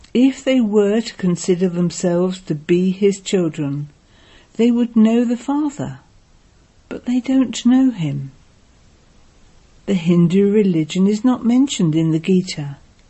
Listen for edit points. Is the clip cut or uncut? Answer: uncut